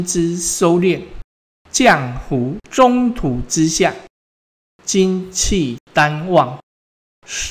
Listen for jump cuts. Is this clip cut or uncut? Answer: uncut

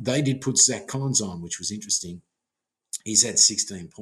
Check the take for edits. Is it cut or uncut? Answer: uncut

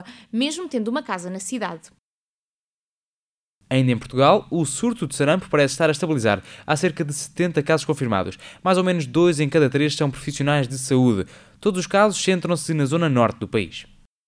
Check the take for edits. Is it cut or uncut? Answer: uncut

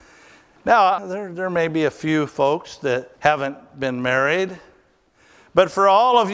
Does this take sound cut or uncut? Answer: cut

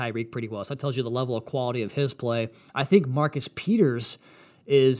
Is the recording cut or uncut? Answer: uncut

